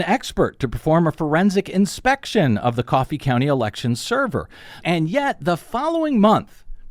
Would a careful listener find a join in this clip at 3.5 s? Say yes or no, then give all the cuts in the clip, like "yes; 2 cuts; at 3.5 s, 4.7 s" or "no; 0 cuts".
no; 1 cut; at 4.8 s